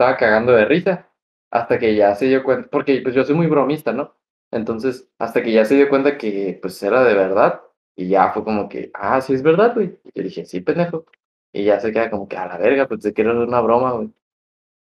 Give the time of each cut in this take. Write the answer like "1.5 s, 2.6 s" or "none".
none